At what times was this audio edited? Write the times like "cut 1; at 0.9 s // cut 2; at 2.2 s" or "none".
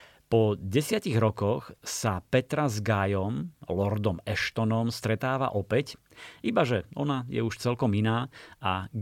none